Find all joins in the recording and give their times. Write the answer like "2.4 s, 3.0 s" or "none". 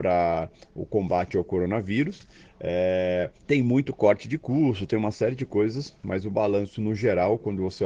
3.4 s